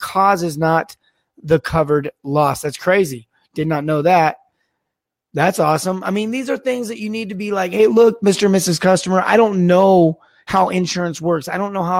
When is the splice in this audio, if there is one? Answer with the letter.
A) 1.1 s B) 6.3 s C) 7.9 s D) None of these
D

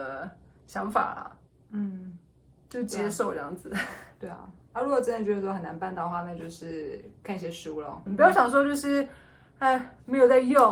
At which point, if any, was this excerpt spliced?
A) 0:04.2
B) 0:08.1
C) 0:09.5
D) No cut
B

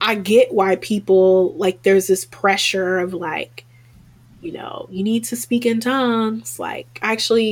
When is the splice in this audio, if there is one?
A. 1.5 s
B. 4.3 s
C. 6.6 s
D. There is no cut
D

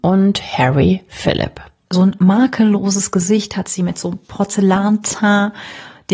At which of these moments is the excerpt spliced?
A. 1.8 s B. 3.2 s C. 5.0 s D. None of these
A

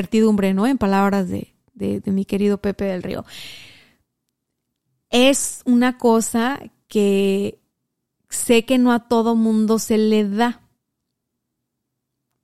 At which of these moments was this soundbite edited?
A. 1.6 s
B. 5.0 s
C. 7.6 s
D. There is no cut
D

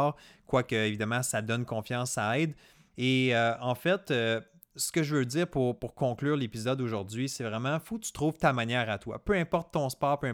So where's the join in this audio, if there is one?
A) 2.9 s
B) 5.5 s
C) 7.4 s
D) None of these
A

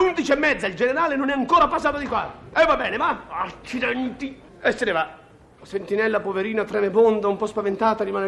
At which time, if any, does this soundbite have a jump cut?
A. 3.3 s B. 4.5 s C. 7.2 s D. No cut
B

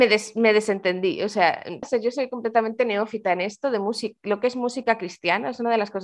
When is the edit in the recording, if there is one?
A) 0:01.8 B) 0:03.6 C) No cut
A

